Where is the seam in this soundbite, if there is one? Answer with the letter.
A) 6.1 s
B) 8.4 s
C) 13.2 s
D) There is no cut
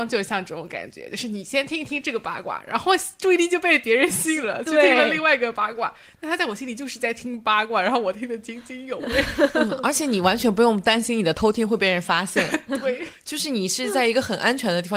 D